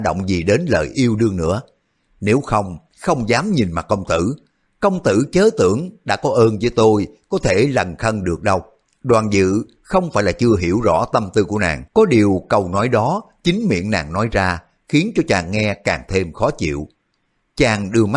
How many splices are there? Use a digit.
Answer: 2